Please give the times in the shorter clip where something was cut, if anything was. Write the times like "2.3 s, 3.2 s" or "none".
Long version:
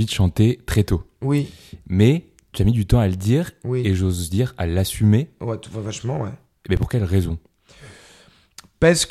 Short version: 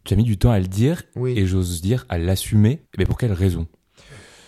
2.8 s